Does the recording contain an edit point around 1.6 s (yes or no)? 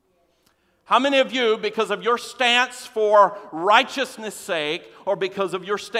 no